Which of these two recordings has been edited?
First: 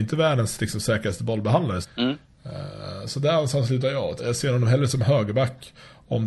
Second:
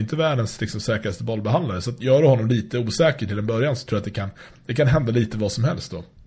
first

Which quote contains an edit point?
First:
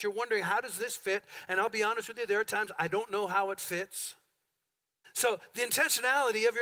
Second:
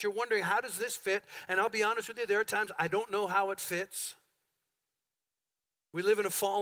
first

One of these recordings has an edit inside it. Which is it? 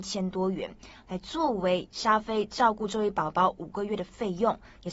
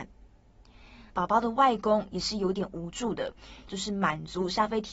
second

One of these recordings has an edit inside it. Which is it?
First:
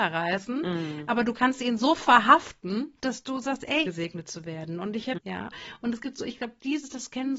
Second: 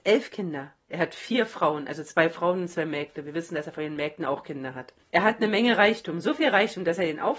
first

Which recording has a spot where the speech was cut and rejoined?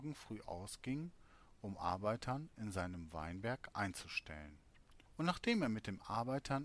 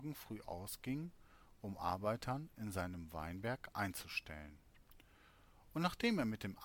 first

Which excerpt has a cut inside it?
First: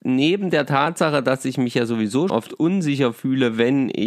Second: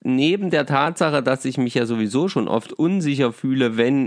first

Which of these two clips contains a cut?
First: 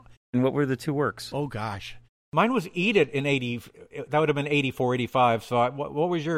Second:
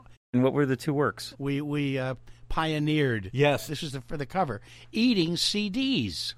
second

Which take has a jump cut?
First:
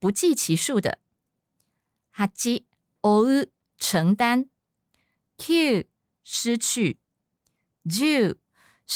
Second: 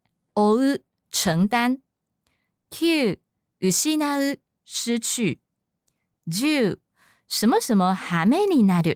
first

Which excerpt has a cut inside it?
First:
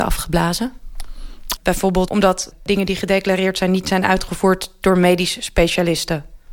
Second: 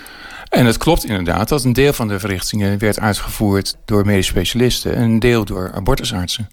first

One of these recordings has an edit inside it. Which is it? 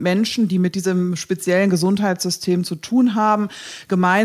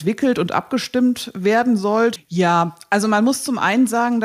second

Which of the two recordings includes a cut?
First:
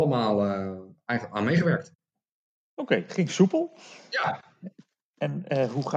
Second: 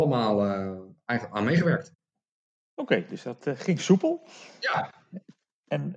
first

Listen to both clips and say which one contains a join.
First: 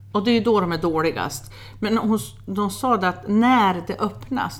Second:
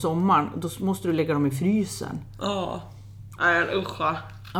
second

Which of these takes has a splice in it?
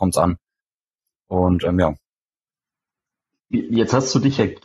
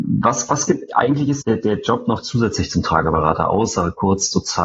second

